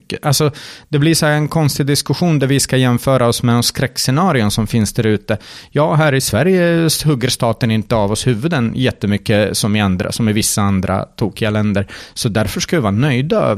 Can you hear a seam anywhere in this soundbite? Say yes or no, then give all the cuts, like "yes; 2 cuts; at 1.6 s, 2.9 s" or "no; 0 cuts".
no; 0 cuts